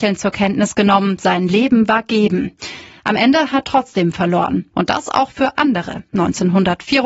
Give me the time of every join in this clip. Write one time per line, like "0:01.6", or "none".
0:03.6
0:04.7